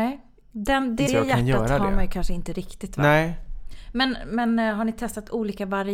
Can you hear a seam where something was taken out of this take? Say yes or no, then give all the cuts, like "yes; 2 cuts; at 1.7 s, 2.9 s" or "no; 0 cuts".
yes; 1 cut; at 1.1 s